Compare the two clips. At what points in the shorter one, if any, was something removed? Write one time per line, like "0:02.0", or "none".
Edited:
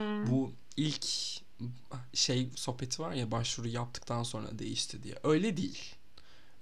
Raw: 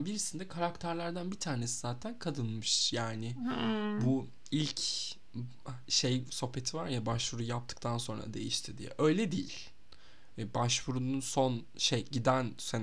none

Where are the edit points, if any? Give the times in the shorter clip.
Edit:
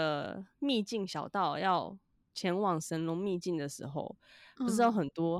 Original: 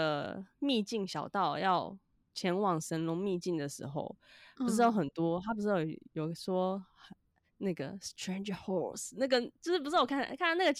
none

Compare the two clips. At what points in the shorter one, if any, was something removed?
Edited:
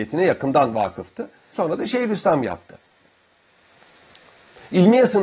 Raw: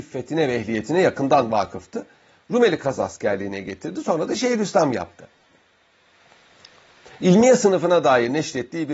0:01.5

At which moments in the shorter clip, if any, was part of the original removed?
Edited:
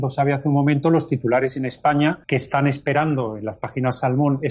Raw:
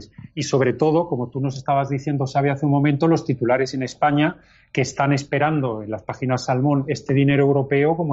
0:02.2

